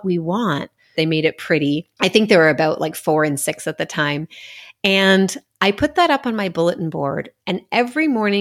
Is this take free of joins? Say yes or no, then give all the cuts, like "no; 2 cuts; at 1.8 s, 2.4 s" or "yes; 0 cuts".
no; 1 cut; at 1.0 s